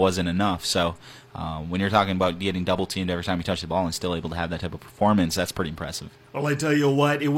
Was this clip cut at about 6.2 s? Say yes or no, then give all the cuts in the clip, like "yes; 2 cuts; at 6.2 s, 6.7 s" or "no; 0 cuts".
no; 0 cuts